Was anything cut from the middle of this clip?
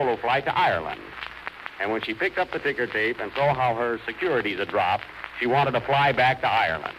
yes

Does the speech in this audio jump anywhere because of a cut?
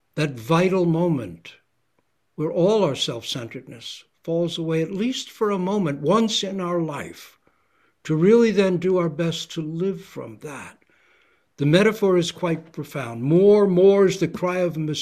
no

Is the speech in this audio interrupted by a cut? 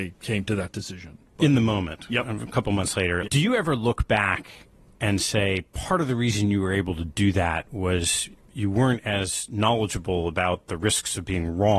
yes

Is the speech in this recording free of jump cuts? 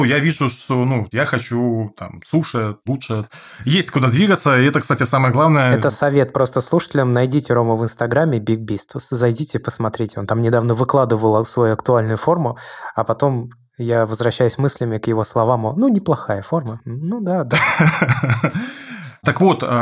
yes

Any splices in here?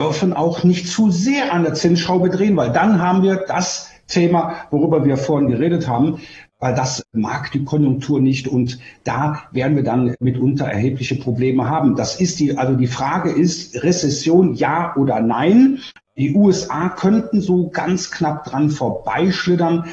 no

